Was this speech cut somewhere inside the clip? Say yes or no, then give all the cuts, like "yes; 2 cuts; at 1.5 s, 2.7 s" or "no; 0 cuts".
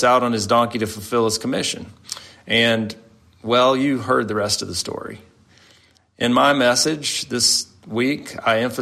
no; 0 cuts